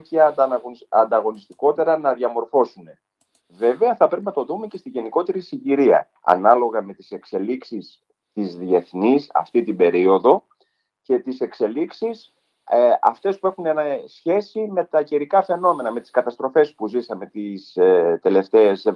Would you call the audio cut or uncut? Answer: cut